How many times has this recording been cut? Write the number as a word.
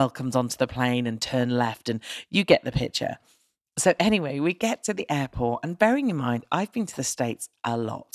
zero